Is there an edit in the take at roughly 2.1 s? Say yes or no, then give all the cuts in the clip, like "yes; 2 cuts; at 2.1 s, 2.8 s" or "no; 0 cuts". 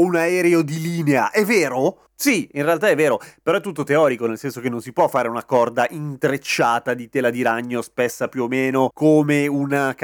yes; 1 cut; at 2.1 s